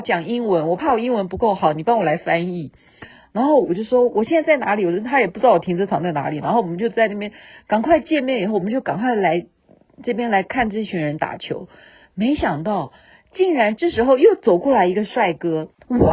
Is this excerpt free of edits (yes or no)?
yes